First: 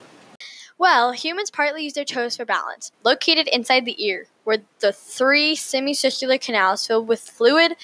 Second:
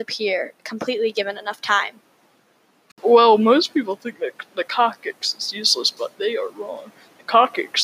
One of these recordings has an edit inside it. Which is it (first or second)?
first